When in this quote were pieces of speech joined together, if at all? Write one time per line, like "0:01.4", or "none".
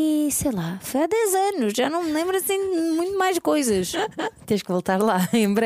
none